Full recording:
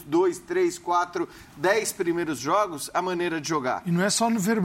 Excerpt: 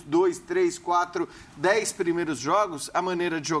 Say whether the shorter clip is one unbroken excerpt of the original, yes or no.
yes